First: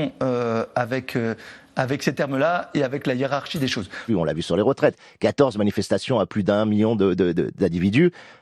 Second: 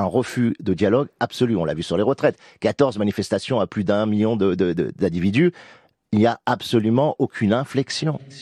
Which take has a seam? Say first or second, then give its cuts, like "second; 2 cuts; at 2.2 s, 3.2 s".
first; 1 cut; at 4.1 s